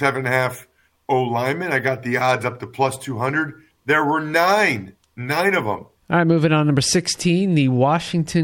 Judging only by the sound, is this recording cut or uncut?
cut